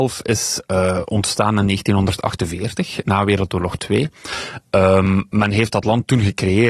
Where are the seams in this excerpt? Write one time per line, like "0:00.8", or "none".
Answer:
none